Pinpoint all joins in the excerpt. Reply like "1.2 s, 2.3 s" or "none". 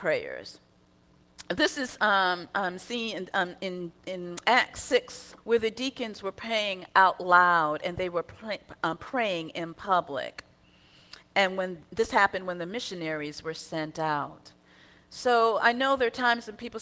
5.4 s